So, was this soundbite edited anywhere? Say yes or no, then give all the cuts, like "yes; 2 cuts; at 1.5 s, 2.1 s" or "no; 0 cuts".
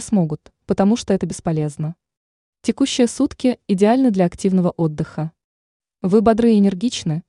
no; 0 cuts